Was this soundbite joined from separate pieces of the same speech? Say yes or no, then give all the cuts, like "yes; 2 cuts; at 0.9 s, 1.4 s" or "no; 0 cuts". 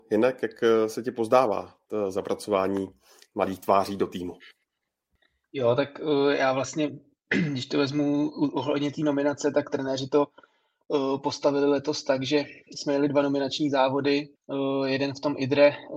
yes; 1 cut; at 14.4 s